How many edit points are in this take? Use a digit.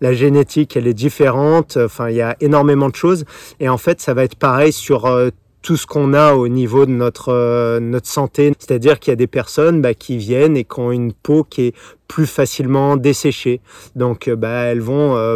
1